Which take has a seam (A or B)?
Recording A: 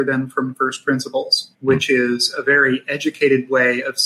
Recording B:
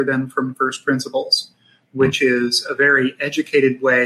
A